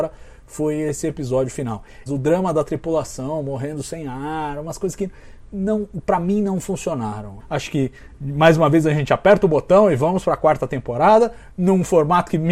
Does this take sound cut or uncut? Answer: cut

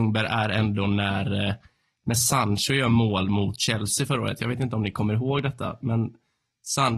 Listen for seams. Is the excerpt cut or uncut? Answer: uncut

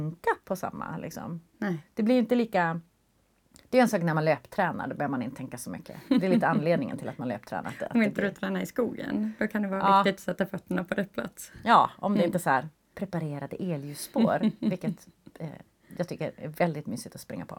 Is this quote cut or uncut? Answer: uncut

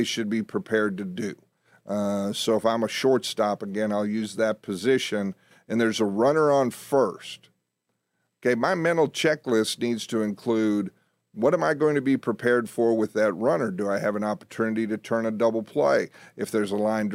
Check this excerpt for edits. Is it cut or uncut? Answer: uncut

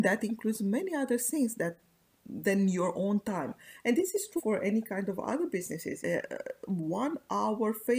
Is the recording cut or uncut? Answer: cut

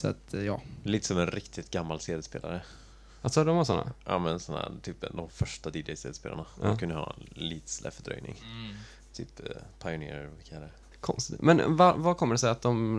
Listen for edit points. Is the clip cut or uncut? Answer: cut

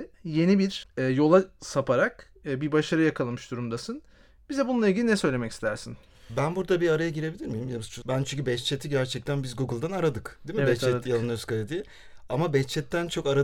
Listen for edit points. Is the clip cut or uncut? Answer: cut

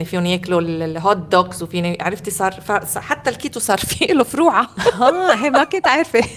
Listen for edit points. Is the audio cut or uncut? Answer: uncut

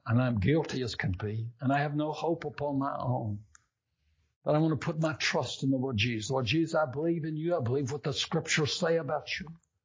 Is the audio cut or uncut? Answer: uncut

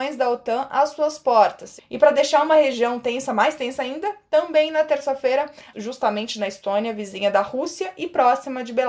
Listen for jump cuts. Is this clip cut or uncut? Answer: cut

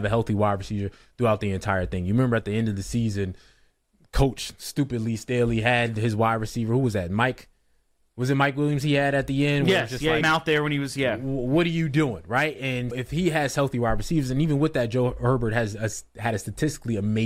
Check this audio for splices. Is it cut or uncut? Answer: cut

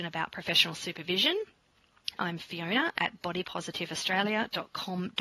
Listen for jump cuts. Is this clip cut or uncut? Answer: cut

